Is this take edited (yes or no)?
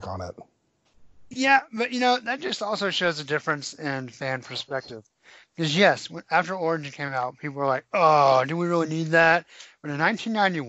no